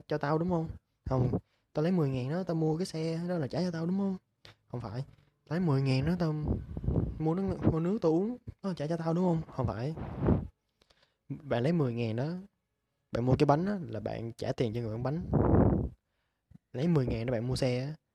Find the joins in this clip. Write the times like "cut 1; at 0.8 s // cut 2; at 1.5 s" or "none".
none